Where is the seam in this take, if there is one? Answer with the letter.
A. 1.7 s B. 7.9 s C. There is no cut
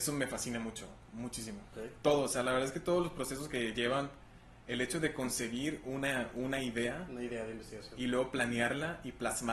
A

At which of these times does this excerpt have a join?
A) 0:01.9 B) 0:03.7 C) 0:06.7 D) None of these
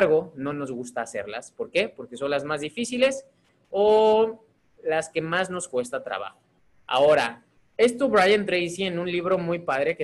C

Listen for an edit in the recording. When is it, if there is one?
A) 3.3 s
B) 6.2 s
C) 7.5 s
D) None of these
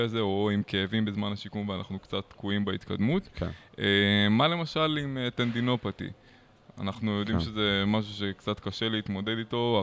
D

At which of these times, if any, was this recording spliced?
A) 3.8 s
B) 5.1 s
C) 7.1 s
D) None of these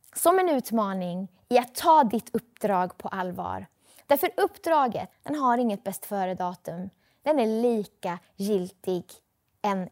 B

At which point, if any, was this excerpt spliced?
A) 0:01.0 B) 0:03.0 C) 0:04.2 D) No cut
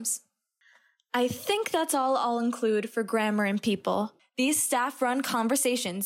C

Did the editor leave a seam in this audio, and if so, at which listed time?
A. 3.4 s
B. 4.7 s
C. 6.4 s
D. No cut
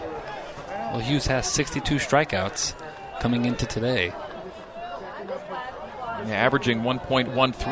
D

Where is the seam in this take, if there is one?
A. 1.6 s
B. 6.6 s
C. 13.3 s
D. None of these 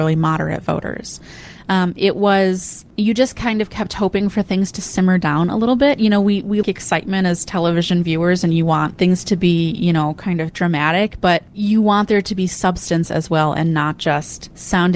B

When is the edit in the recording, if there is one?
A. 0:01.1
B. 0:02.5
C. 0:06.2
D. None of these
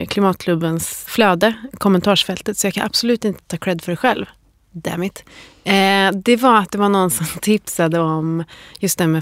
A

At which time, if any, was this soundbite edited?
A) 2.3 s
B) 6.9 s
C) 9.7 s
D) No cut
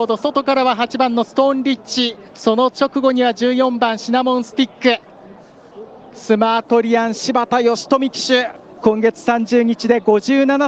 A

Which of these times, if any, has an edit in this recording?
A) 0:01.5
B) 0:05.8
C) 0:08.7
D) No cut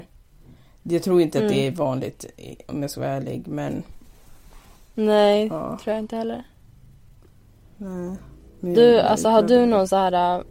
C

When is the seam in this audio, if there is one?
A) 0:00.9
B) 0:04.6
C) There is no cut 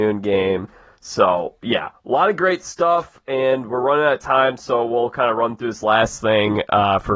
C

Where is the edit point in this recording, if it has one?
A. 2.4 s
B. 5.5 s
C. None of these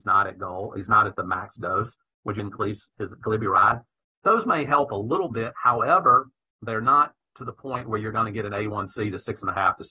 A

